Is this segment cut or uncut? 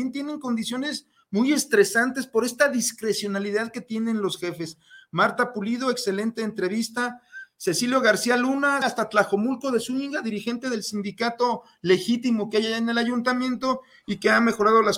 cut